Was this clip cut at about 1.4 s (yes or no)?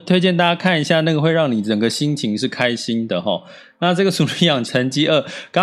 no